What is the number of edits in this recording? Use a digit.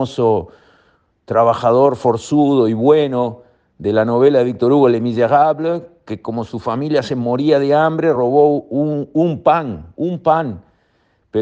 0